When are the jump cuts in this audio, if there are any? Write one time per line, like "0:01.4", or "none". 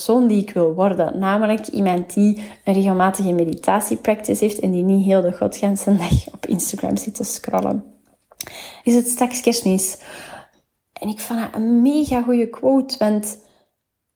0:08.8
0:10.8